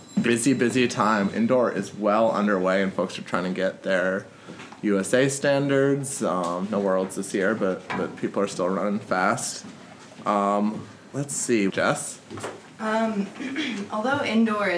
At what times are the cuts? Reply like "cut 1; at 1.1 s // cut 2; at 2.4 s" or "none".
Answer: cut 1; at 11.7 s